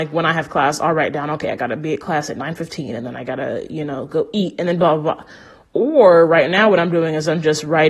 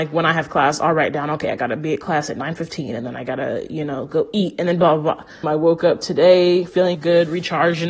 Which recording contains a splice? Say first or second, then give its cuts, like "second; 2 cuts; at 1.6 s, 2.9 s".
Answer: second; 2 cuts; at 5.4 s, 6.9 s